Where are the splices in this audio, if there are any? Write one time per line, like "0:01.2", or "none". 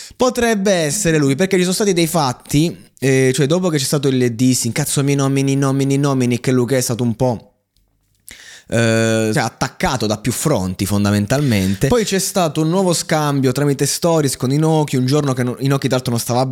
0:09.3